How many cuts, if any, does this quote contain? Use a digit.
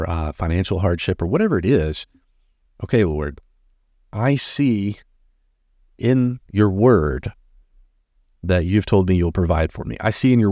1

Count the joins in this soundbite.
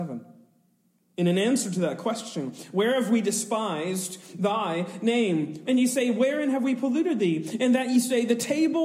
1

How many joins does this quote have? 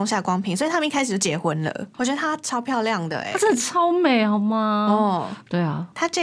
1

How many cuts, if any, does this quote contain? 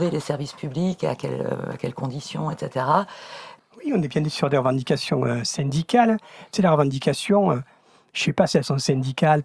1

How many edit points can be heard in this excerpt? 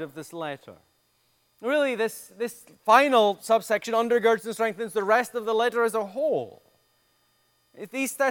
0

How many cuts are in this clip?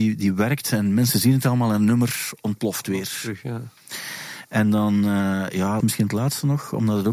1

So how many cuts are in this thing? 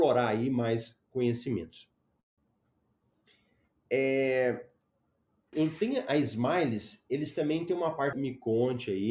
2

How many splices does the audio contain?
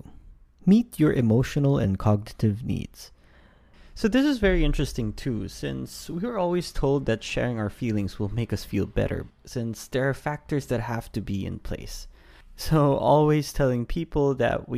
1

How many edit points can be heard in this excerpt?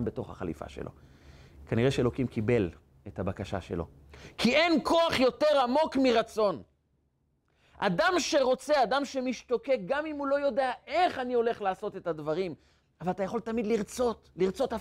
0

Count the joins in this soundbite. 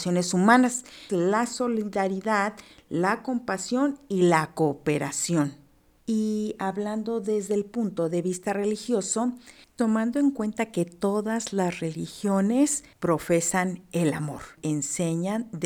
2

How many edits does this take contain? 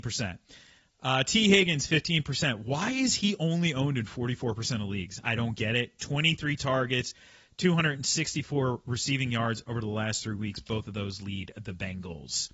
0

